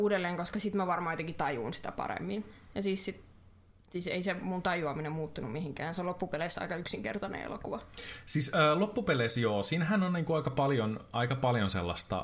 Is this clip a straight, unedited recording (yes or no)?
yes